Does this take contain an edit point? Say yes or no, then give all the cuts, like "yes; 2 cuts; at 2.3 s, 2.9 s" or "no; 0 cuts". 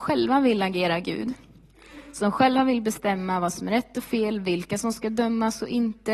no; 0 cuts